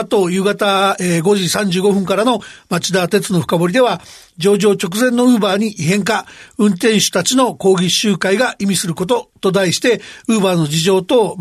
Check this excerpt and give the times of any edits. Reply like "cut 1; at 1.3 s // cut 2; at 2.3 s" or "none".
none